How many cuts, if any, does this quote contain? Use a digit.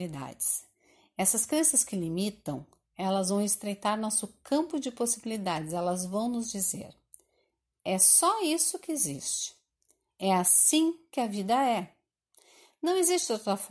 0